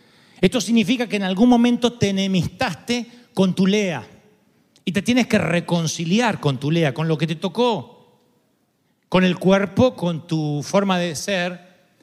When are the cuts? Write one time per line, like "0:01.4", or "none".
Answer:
none